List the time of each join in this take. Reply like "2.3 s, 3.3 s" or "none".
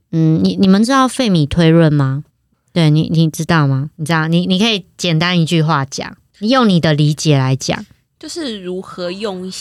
2.5 s